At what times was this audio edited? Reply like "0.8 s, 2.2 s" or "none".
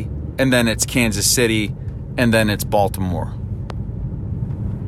2.1 s